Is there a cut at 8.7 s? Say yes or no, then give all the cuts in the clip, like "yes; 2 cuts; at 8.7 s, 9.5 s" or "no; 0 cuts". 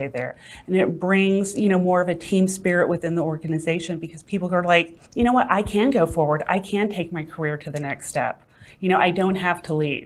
no; 1 cut; at 5.0 s